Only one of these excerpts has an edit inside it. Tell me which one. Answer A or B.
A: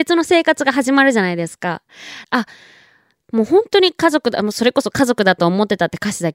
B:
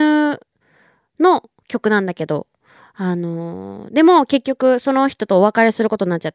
A